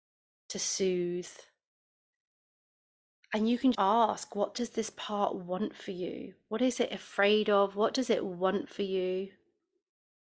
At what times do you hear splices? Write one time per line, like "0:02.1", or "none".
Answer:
0:03.7